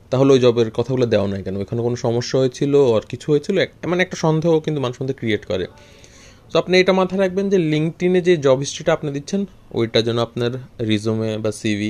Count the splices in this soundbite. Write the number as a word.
zero